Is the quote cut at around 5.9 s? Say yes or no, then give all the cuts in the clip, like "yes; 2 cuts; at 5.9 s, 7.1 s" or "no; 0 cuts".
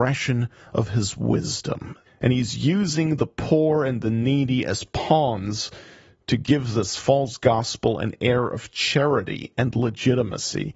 no; 1 cut; at 2.1 s